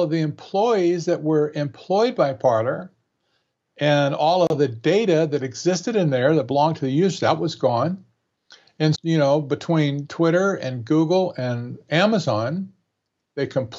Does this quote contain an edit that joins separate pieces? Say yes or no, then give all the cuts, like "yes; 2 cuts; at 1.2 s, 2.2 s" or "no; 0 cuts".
yes; 1 cut; at 8.9 s